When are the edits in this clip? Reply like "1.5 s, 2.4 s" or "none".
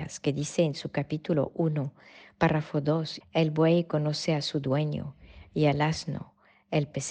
3.2 s